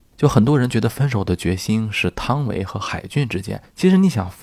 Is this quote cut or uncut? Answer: uncut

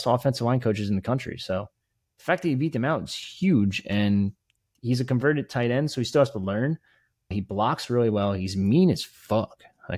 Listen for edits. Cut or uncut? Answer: cut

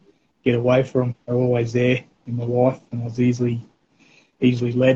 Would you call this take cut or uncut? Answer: uncut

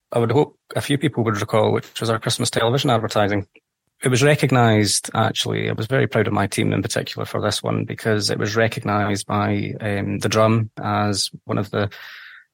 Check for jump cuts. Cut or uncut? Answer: uncut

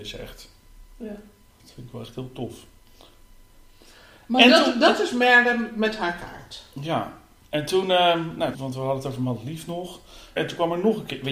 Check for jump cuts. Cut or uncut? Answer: cut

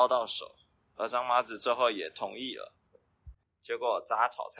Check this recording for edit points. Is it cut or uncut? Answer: cut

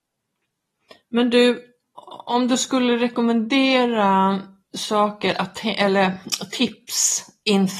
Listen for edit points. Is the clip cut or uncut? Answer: uncut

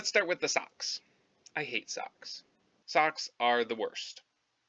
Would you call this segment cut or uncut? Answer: cut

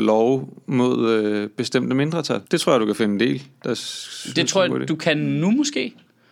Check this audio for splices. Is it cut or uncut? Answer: cut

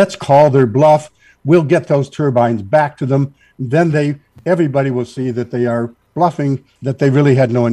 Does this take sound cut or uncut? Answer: cut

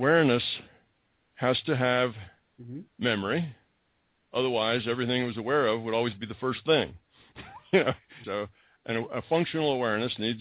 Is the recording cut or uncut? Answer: cut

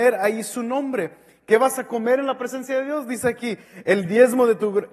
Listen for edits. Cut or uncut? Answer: uncut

